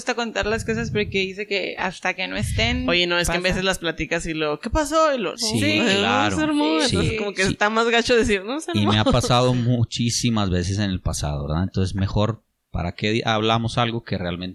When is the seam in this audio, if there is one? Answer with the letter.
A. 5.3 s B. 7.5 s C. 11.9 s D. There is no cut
A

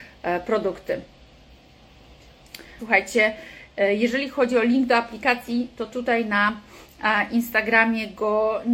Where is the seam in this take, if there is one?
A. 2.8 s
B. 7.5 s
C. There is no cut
A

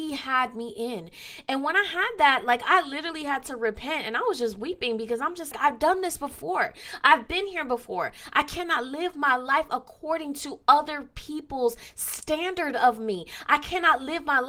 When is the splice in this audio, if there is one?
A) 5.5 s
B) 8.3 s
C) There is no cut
A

